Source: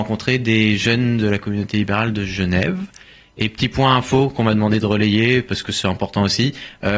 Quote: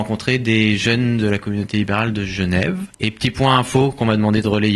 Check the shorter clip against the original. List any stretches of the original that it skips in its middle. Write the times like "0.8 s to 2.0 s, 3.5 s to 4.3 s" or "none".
2.9 s to 3.3 s